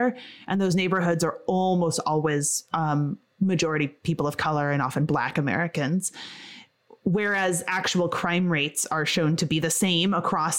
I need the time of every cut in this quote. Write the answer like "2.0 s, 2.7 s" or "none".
none